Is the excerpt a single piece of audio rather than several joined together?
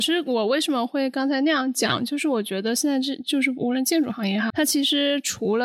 no; 1 cut; at 4.5 s

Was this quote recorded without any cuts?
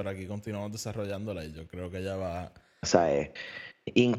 no; 1 cut; at 2.8 s

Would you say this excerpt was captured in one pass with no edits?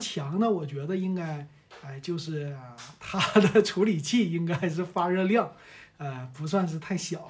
yes; 0 cuts

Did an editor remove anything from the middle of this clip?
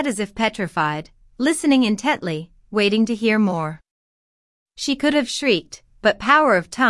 no; 0 cuts

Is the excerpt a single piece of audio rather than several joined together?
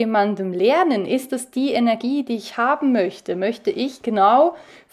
yes; 0 cuts

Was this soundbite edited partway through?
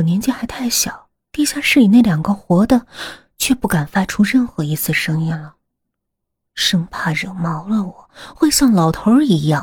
yes; 1 cut; at 1.2 s

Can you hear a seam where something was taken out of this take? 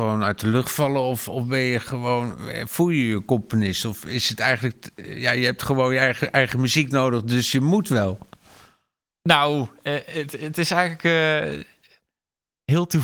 no; 0 cuts

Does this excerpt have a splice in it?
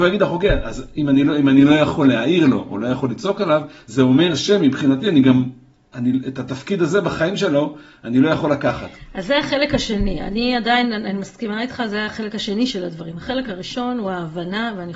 no; 0 cuts

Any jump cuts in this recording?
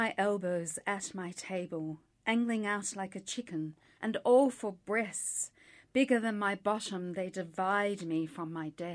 yes; 1 cut; at 4.0 s

